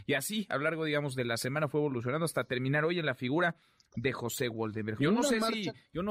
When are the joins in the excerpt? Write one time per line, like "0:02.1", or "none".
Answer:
0:05.0